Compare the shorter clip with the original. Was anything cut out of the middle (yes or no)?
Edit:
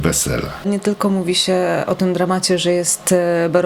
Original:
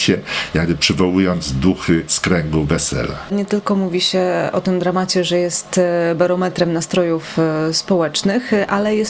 no